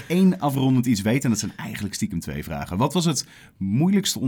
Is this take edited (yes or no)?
no